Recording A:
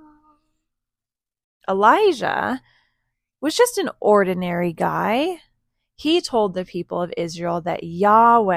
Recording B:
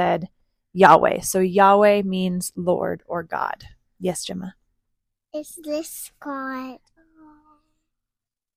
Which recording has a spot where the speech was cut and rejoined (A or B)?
B